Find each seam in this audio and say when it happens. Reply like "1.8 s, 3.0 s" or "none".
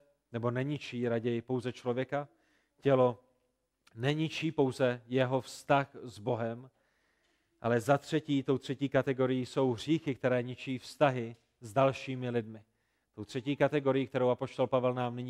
none